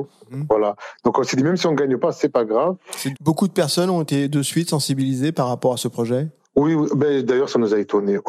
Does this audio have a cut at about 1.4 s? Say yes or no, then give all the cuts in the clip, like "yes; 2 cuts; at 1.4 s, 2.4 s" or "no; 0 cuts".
no; 1 cut; at 3.1 s